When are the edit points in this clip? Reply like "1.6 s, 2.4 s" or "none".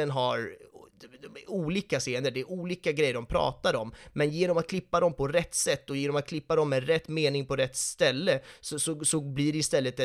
none

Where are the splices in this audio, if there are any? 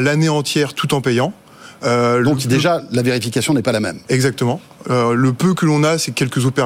none

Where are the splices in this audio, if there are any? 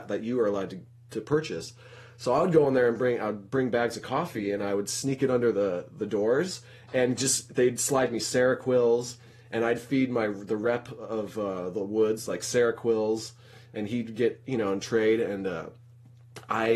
none

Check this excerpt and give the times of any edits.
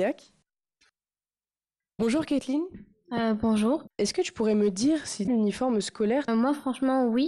3.9 s, 6.3 s

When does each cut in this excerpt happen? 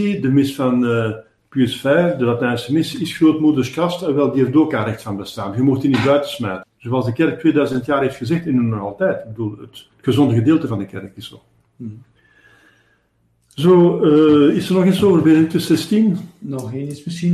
6.6 s

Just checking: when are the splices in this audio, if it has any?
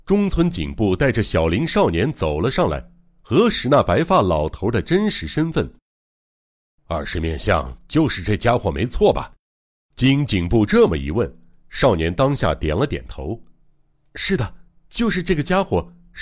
none

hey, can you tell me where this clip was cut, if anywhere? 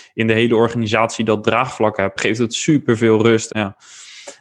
2.2 s, 3.5 s

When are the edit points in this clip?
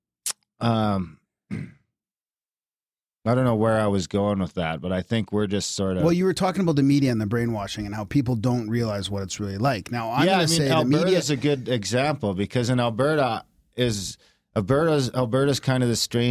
none

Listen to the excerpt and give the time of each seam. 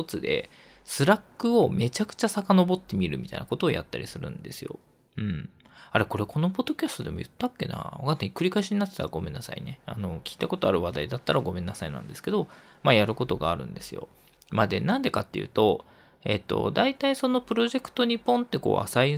none

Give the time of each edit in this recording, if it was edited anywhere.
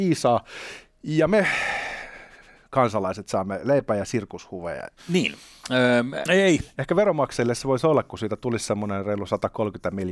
5.0 s, 6.2 s

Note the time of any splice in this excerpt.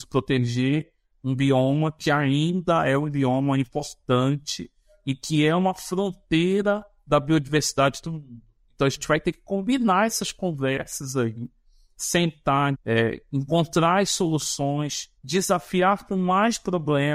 12.7 s, 15.2 s

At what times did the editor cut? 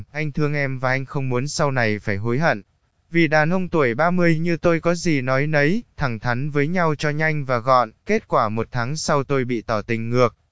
none

